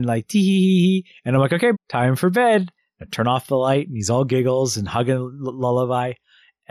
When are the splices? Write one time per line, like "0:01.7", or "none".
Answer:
0:01.7